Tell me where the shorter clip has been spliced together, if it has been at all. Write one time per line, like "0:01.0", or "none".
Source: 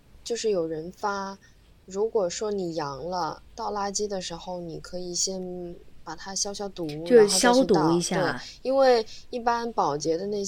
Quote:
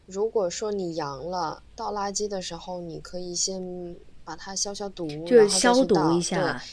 none